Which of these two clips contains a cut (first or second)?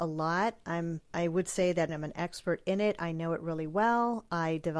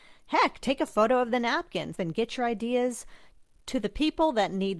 second